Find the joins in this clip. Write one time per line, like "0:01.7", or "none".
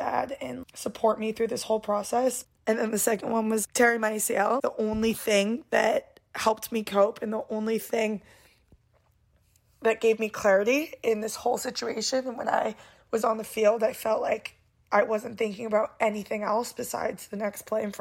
0:02.4

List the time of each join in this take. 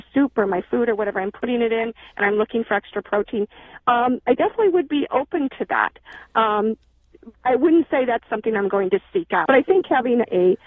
0:07.3
0:09.5

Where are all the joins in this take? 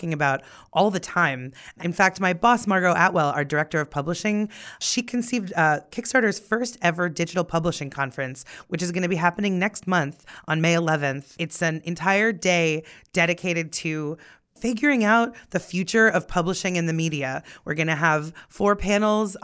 none

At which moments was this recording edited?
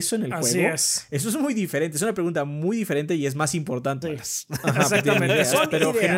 0:04.0

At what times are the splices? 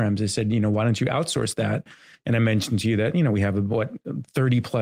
none

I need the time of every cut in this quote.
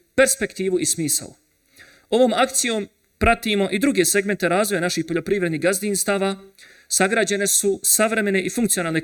none

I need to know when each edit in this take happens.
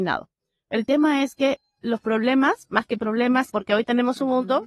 0:03.5

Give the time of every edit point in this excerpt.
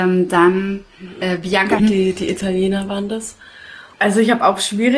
0:01.8
0:03.9

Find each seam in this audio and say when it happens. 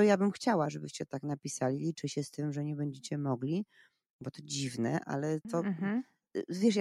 0:05.0

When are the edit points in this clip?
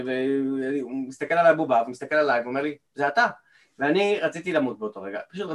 0:02.9

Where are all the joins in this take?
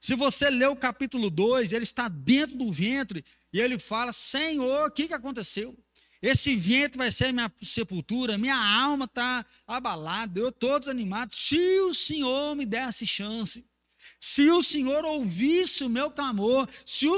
none

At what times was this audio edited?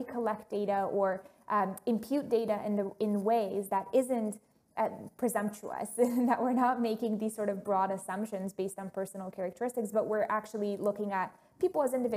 none

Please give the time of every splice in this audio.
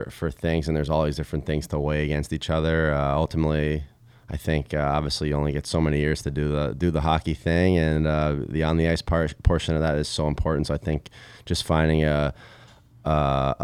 none

